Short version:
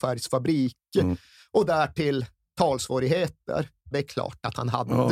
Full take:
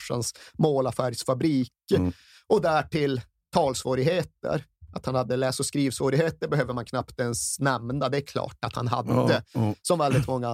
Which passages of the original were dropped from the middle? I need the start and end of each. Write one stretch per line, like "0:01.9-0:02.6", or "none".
0:04.9-0:08.1